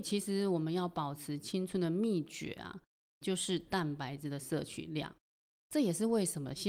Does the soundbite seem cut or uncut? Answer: uncut